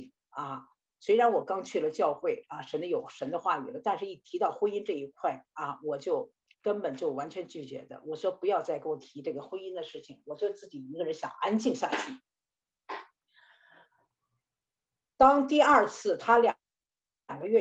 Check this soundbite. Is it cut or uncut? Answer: uncut